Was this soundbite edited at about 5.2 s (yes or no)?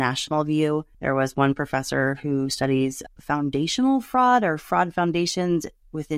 no